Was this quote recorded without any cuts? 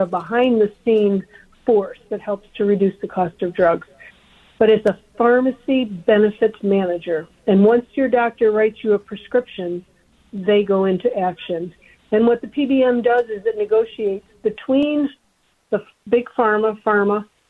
yes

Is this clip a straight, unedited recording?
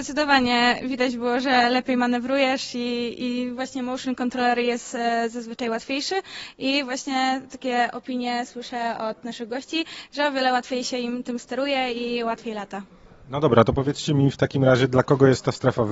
yes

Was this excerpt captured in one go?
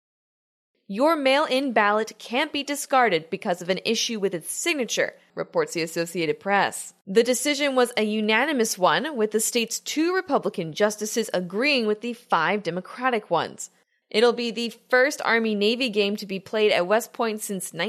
no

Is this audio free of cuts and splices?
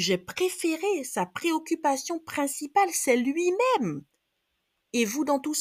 yes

